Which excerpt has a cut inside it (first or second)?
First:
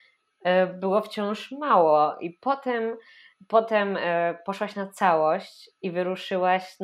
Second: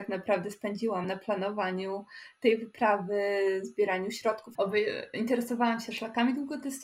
second